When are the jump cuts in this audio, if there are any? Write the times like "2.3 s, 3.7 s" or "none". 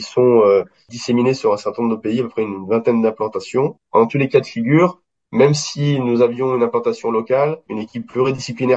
3.8 s, 7.7 s